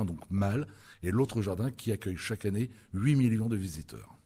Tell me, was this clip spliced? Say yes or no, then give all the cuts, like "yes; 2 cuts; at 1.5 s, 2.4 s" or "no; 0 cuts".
no; 0 cuts